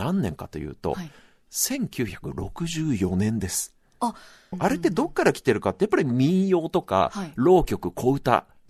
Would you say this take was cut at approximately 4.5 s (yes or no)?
yes